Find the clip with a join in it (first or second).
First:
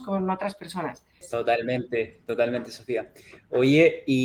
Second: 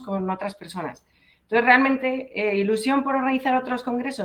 first